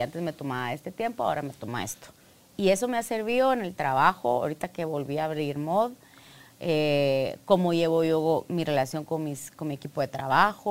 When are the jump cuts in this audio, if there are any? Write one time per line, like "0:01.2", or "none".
none